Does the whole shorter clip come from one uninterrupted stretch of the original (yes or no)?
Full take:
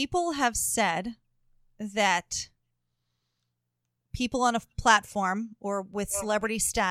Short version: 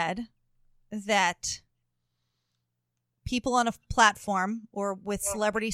yes